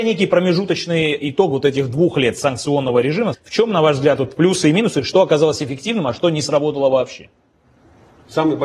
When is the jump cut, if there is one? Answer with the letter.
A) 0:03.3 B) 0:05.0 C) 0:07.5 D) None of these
A